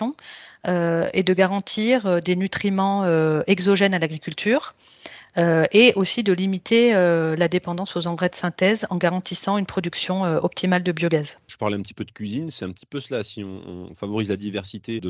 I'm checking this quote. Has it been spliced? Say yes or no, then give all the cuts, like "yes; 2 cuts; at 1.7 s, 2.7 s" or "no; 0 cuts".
no; 0 cuts